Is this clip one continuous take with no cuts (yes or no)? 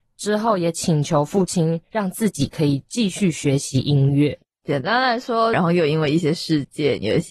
no